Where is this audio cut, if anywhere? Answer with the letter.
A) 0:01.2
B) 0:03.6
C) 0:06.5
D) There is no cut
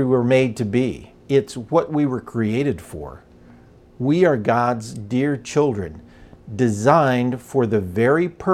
A